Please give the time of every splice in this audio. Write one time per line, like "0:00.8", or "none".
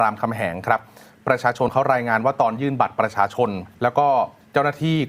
0:03.7